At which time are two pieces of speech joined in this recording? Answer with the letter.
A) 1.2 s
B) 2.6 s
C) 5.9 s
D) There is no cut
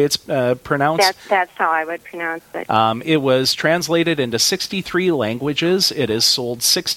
B